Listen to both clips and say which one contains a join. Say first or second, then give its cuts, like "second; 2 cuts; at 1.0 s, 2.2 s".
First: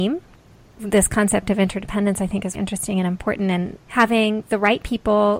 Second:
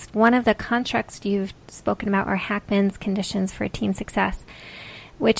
first; 2 cuts; at 2.5 s, 3.8 s